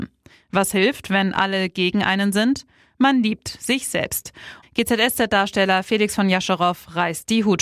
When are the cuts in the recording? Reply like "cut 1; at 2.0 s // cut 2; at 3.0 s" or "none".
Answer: cut 1; at 4.6 s